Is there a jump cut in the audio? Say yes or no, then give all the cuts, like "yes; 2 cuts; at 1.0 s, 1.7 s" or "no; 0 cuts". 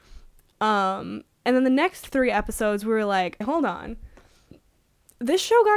yes; 1 cut; at 3.4 s